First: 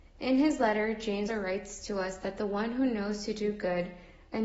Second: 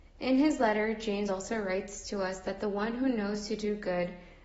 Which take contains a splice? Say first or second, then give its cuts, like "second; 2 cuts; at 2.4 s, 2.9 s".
first; 1 cut; at 1.3 s